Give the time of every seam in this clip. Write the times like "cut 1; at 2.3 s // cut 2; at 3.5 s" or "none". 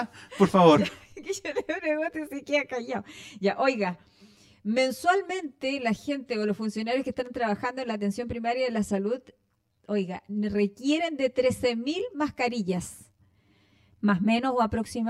cut 1; at 13.9 s